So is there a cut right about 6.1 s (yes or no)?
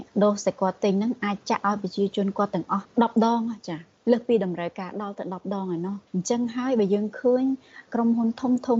yes